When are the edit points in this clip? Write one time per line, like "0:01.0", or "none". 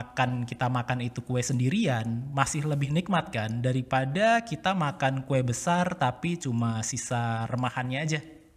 none

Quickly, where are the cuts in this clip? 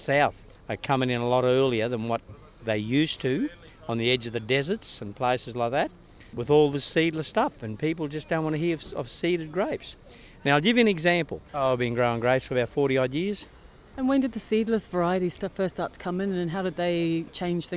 0:11.5

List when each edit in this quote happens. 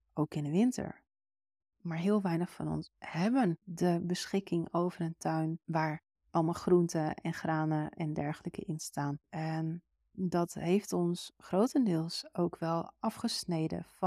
0:01.7
0:09.2

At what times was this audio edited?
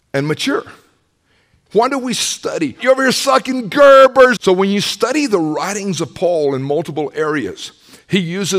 0:01.7
0:02.8
0:04.4

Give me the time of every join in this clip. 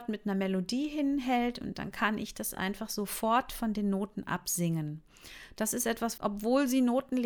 0:06.2

